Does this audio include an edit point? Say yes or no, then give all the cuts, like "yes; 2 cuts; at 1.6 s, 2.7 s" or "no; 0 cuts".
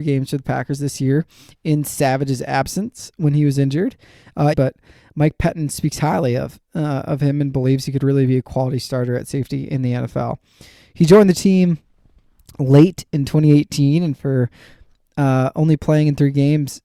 yes; 1 cut; at 4.5 s